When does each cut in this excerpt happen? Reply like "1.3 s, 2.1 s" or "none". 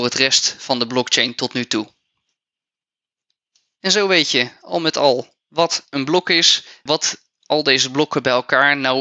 6.9 s